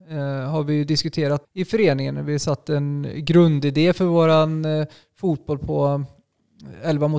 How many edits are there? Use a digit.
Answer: 1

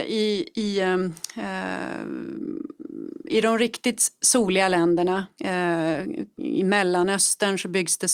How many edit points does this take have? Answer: 1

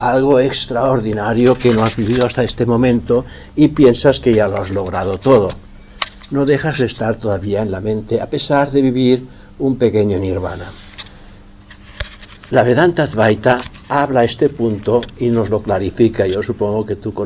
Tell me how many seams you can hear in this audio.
0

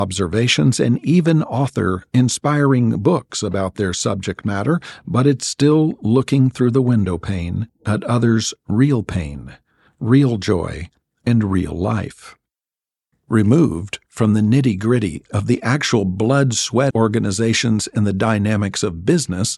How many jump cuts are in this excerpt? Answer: 2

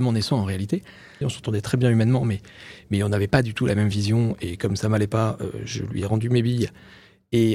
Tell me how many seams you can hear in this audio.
1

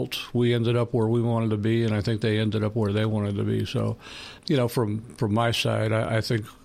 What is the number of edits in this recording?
1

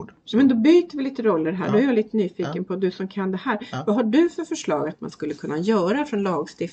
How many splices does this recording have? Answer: 0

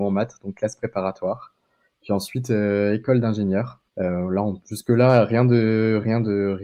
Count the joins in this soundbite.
1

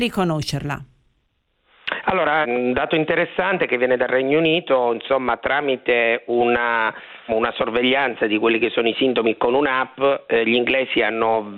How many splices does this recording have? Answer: 2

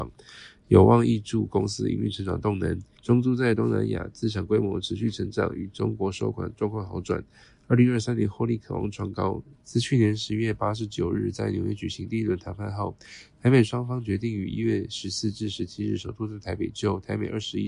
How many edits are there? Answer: 2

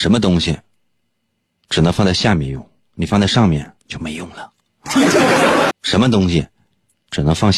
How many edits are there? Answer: 2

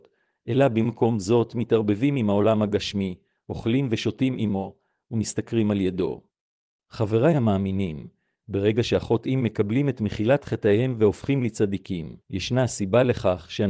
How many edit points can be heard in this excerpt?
2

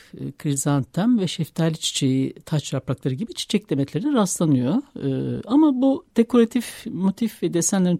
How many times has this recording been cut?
0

